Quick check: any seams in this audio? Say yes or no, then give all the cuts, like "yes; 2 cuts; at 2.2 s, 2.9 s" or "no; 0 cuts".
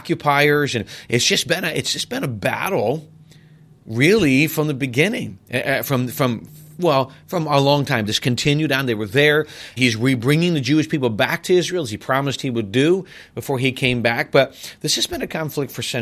yes; 2 cuts; at 8.0 s, 9.8 s